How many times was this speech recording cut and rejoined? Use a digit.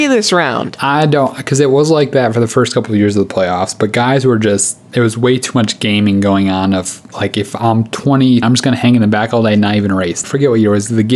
2